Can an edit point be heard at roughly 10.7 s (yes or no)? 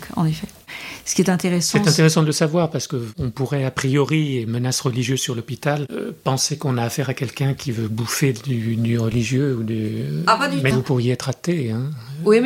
yes